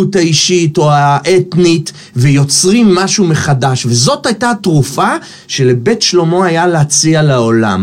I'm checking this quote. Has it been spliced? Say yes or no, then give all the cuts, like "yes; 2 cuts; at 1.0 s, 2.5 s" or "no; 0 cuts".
no; 0 cuts